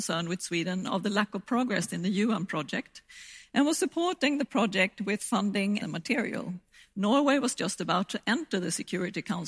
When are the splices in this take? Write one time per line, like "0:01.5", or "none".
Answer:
0:05.8